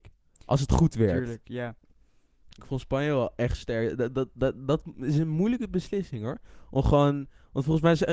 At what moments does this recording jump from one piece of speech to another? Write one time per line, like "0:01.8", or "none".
0:02.5